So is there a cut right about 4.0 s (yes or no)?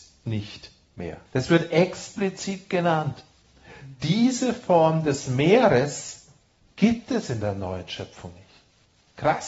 no